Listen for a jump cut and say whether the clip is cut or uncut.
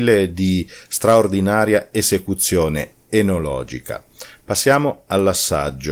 uncut